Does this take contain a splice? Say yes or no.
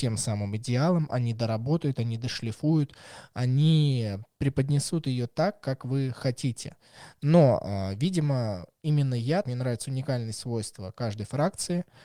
yes